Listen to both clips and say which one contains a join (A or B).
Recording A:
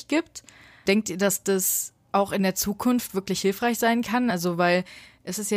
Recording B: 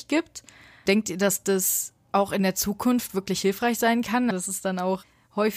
B